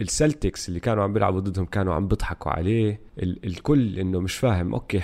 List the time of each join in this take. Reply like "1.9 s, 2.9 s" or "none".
3.1 s